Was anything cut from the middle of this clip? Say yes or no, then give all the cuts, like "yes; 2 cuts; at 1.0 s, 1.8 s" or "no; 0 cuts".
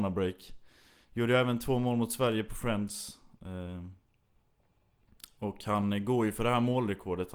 no; 0 cuts